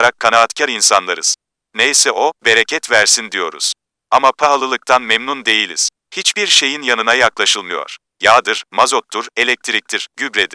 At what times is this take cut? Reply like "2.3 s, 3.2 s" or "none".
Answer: none